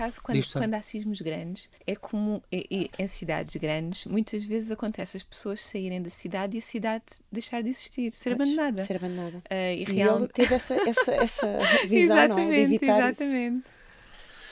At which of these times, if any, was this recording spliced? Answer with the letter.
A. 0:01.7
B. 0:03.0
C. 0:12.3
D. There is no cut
A